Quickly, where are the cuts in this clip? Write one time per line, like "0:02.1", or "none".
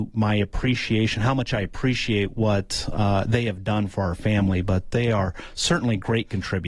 none